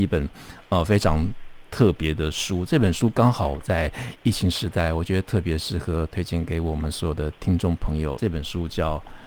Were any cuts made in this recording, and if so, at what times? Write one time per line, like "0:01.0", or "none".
0:08.2